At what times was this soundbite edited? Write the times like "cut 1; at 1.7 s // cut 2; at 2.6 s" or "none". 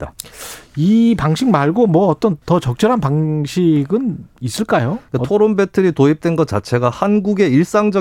cut 1; at 2.4 s